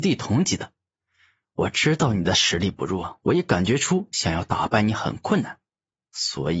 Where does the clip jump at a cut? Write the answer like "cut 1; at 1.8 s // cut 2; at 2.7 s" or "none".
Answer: none